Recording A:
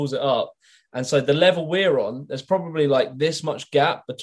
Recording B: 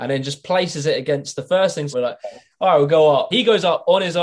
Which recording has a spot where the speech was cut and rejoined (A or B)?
B